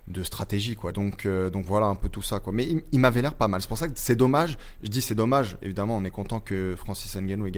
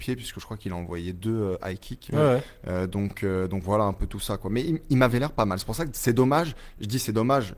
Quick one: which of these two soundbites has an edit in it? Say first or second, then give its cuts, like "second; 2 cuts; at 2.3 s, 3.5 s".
first; 1 cut; at 0.9 s